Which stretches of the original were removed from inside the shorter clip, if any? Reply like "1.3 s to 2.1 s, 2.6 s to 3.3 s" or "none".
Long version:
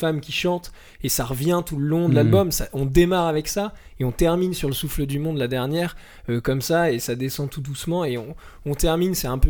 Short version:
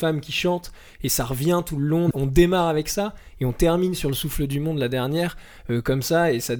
2.1 s to 2.7 s